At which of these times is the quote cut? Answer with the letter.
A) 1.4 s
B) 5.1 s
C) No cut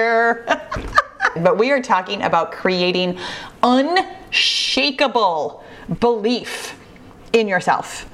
A